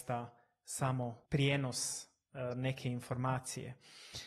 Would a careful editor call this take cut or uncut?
cut